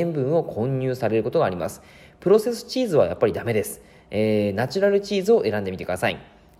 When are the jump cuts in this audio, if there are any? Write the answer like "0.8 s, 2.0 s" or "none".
none